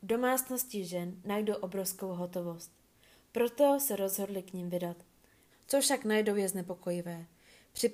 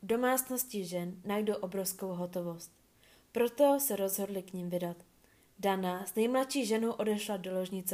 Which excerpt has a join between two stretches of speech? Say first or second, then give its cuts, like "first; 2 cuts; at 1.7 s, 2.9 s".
first; 1 cut; at 5.5 s